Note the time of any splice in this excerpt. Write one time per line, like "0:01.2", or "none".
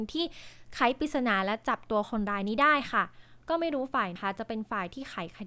0:04.2